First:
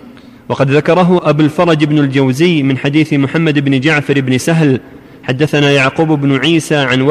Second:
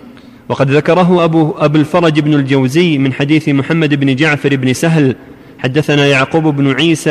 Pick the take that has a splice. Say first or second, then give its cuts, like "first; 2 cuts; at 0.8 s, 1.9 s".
first; 1 cut; at 1.2 s